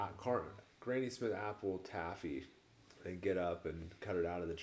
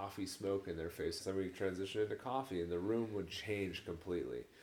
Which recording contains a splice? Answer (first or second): second